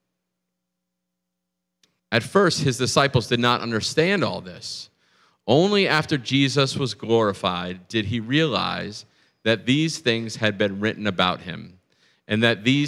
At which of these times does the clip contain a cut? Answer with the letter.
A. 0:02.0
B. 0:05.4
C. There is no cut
A